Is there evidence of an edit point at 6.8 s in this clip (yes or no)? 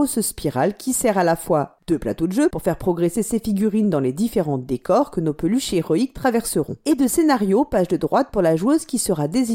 no